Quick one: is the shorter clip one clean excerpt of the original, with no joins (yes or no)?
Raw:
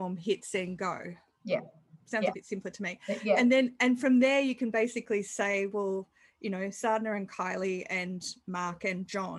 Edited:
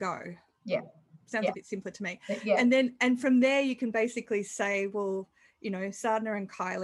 yes